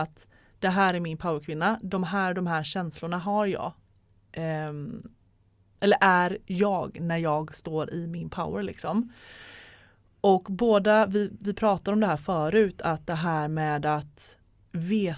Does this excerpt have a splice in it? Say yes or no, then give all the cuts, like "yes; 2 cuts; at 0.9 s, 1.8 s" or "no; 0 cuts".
no; 0 cuts